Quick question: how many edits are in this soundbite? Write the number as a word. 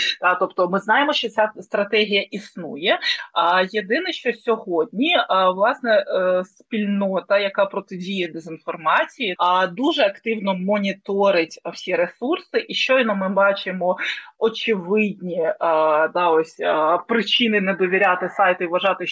one